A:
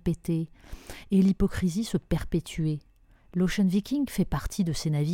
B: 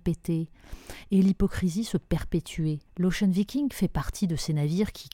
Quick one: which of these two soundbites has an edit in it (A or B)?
B